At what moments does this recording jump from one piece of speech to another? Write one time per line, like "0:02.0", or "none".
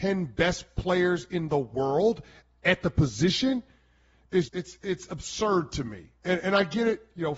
0:04.5